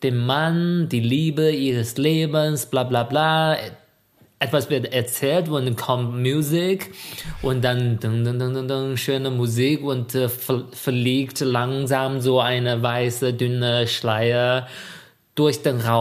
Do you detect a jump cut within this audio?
no; 0 cuts

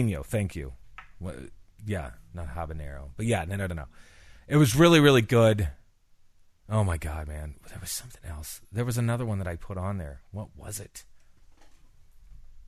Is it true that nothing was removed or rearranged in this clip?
yes; 0 cuts

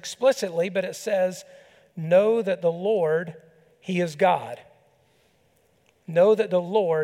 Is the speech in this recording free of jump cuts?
yes; 0 cuts

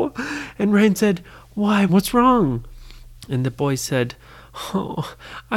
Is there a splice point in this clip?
yes; 2 cuts; at 1.9 s, 3.2 s

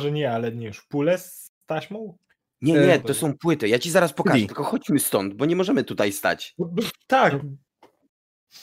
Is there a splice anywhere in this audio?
no; 0 cuts

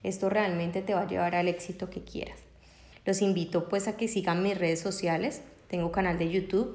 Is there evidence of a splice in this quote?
yes; 1 cut; at 2.9 s

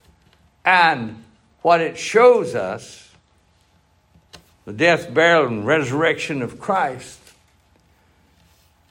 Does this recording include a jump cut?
no; 0 cuts

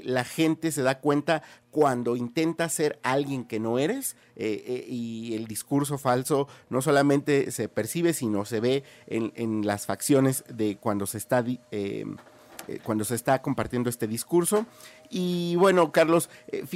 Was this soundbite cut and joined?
no; 0 cuts

